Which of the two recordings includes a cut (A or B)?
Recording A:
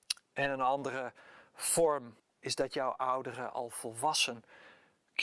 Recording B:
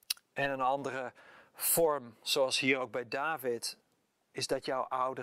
A